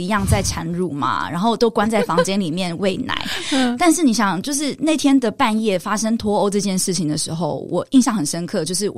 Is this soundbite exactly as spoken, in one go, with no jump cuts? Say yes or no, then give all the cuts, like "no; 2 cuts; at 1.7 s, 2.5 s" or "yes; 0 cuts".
yes; 0 cuts